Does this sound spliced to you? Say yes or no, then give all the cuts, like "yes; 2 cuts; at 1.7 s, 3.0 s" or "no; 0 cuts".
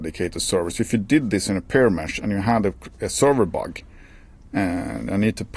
no; 0 cuts